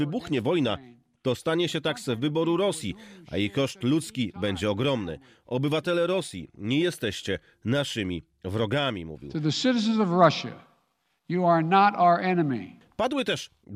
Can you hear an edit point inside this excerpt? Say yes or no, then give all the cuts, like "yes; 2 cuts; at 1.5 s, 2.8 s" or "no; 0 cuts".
no; 0 cuts